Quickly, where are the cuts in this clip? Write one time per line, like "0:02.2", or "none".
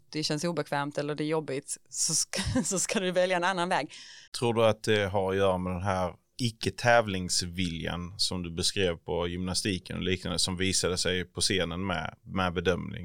0:04.3
0:06.3